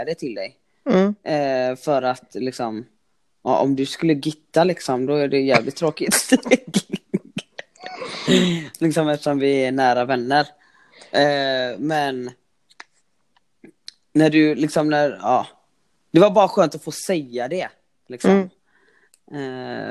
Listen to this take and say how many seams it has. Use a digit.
0